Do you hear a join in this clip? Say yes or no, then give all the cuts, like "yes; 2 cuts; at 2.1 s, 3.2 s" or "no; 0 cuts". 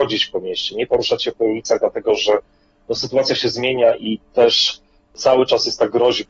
no; 0 cuts